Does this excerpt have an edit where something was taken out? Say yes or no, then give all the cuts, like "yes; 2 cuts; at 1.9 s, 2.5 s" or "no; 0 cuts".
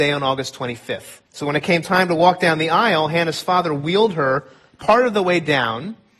yes; 1 cut; at 1.3 s